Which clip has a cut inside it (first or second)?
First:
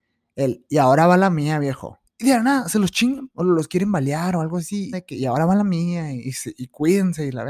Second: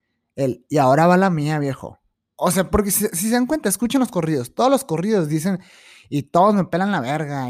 first